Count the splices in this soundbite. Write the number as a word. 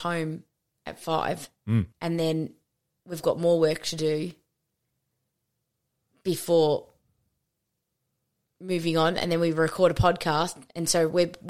one